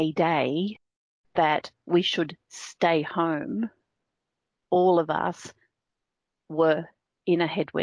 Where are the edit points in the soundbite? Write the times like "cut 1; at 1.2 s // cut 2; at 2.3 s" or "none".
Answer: cut 1; at 4.6 s